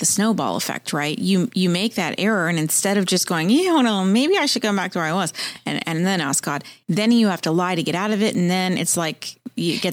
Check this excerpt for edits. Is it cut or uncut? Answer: uncut